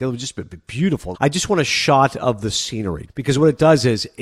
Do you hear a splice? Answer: yes; 2 cuts; at 1.1 s, 3.1 s

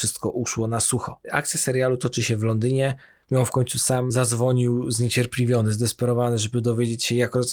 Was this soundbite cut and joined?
yes; 1 cut; at 3.2 s

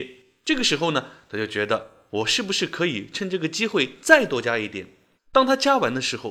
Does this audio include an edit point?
yes; 1 cut; at 5.2 s

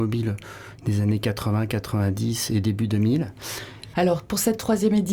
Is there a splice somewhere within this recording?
yes; 1 cut; at 3.9 s

